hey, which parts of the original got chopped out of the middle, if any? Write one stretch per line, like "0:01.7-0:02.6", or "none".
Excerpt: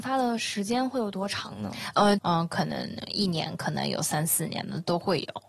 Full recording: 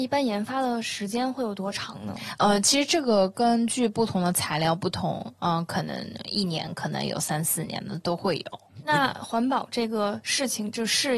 0:02.6-0:05.4